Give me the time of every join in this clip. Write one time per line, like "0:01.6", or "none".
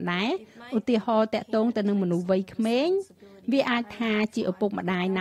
none